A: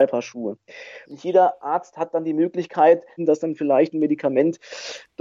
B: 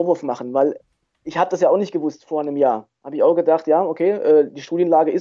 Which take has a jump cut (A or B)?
A